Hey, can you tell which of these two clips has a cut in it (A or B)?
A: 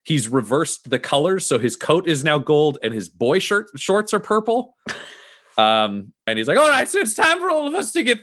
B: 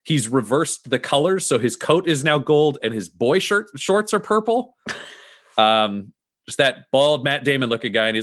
A